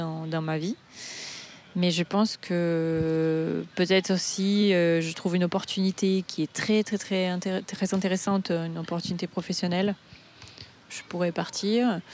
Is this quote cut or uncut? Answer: uncut